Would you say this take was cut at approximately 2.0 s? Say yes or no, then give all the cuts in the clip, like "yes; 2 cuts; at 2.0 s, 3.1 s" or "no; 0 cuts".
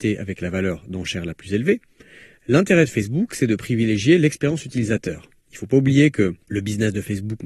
no; 0 cuts